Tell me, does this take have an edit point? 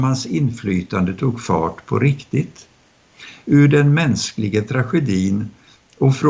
no; 0 cuts

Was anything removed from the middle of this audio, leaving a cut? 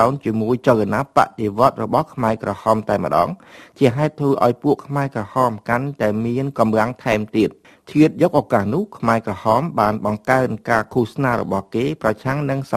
no; 0 cuts

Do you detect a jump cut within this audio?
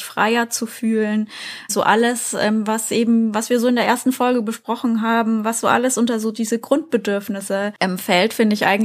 no; 0 cuts

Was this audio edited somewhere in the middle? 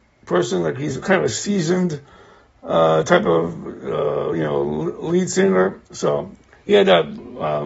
no; 0 cuts

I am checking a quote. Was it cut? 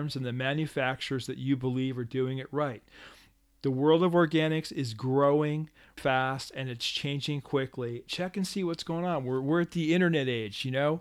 yes; 2 cuts; at 6.0 s, 8.1 s

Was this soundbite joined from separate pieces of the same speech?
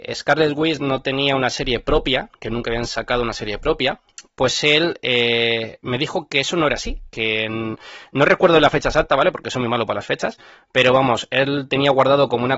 no; 0 cuts

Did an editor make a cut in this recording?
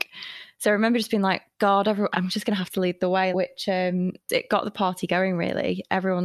yes; 2 cuts; at 2.1 s, 3.3 s

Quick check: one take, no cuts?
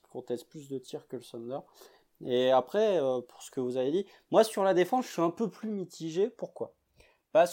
yes; 0 cuts

